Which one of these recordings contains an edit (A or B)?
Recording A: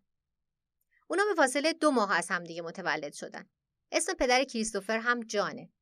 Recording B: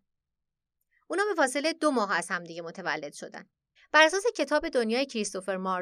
B